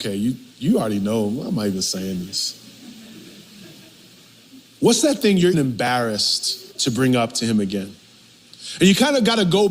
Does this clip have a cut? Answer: yes; 2 cuts; at 5.5 s, 6.7 s

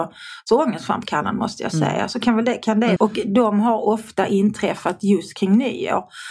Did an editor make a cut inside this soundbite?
yes; 1 cut; at 3.0 s

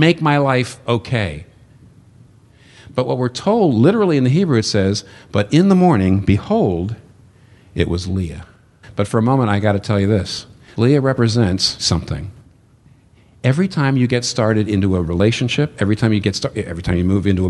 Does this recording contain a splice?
yes; 1 cut; at 8.8 s

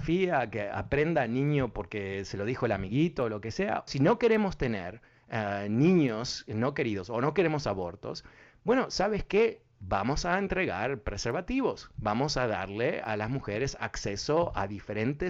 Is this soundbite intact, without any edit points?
no; 1 cut; at 3.9 s

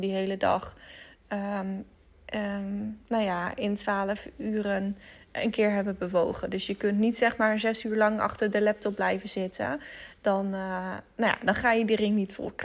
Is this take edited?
no; 0 cuts

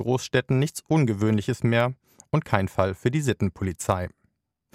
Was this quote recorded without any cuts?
yes; 0 cuts

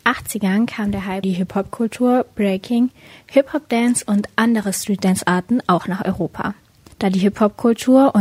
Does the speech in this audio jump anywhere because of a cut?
yes; 2 cuts; at 1.2 s, 6.9 s

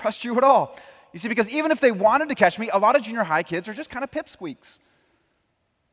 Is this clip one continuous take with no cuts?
yes; 0 cuts

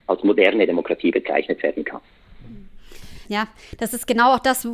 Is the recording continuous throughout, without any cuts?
yes; 0 cuts

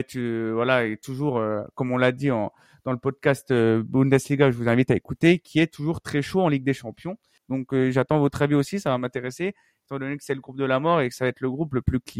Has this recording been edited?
yes; 1 cut; at 7.4 s

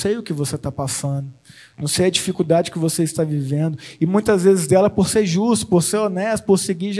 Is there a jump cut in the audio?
no; 0 cuts

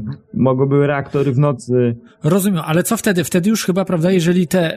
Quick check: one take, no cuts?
yes; 0 cuts

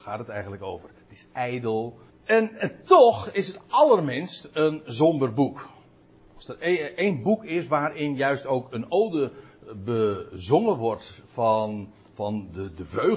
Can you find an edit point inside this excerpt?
yes; 1 cut; at 2.1 s

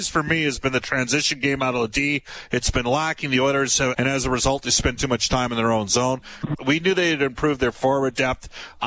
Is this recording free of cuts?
no; 2 cuts; at 3.9 s, 6.6 s

